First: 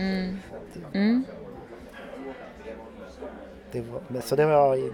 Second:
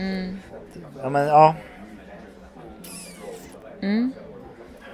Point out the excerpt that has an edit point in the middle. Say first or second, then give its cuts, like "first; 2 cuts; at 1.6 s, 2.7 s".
first; 1 cut; at 0.9 s